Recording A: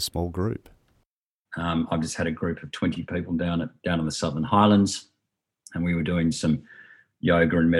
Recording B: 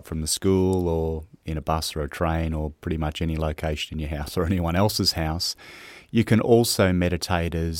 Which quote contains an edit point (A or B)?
A